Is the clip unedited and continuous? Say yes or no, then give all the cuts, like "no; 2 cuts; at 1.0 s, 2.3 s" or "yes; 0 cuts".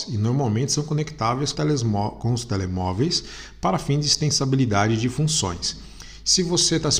no; 1 cut; at 1.5 s